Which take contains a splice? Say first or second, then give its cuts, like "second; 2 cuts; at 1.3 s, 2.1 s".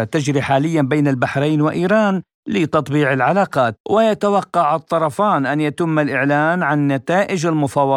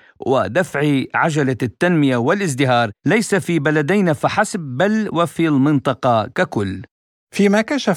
first; 1 cut; at 3.8 s